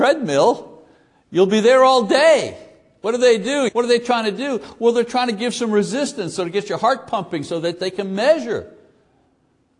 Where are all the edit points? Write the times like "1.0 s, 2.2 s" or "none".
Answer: 3.7 s